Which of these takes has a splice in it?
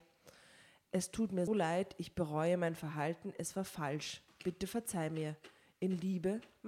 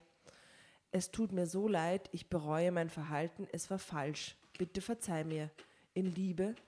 first; 1 cut; at 1.5 s

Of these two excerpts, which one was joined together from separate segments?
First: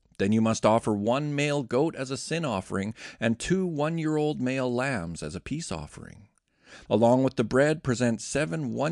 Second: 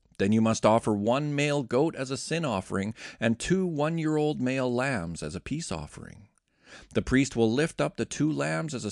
first; 1 cut; at 6.9 s

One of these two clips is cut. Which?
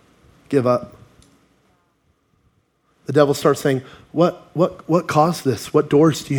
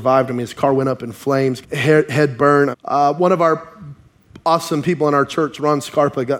second; 2 cuts; at 1.6 s, 2.7 s

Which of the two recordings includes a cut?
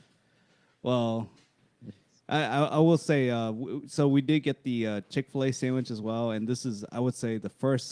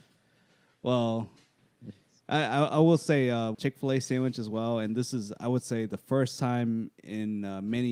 second; 1 cut; at 3.5 s

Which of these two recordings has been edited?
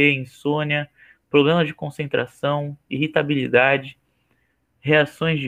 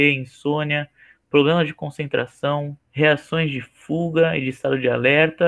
second; 1 cut; at 2.8 s

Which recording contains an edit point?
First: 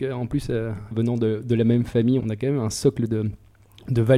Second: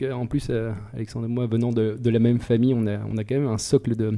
first; 2 cuts; at 0.9 s, 2.2 s

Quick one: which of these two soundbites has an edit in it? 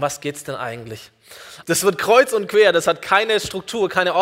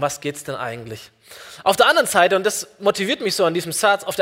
first; 1 cut; at 1.6 s

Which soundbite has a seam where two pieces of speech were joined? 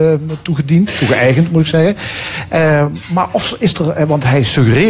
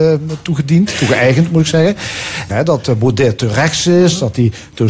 second; 1 cut; at 2.5 s

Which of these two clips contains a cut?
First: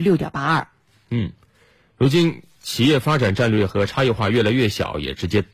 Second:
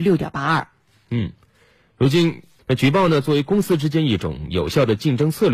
second; 1 cut; at 2.6 s

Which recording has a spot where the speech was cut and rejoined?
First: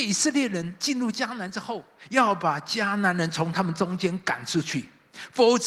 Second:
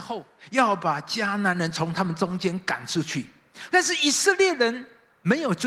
second; 1 cut; at 3.7 s

